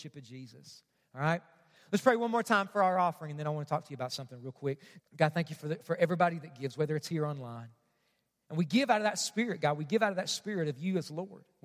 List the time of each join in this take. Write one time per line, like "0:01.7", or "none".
0:05.0